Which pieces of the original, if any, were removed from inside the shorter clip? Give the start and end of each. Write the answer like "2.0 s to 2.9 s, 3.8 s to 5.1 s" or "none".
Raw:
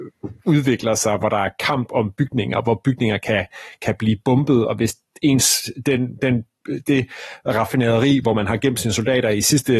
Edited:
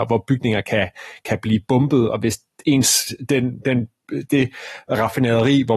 none